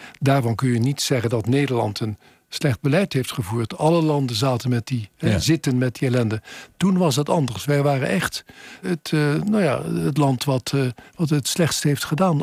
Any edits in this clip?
yes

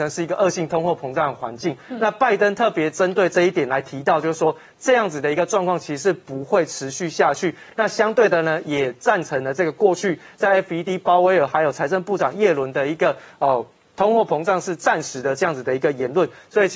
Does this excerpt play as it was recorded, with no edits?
yes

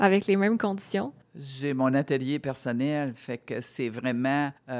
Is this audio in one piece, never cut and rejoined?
yes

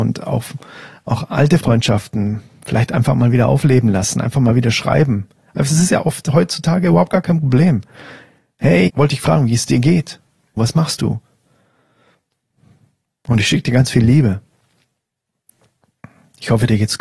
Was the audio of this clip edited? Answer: yes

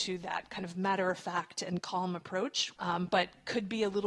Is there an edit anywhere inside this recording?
yes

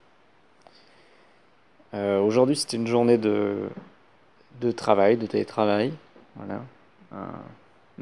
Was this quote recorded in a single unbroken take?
yes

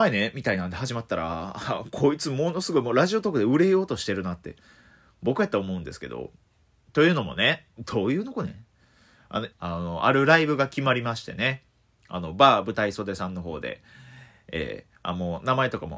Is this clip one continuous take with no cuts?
no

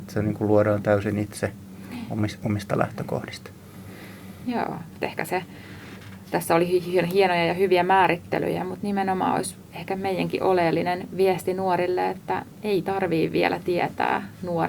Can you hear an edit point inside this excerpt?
yes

